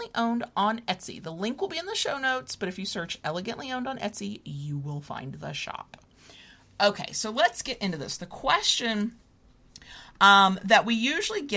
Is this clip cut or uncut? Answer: uncut